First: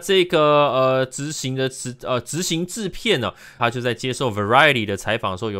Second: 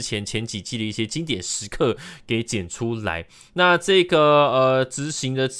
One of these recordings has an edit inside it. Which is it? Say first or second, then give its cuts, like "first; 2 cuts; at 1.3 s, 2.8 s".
first; 1 cut; at 3.6 s